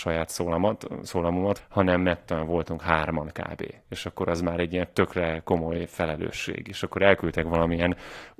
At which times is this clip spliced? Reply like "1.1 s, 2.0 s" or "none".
1.6 s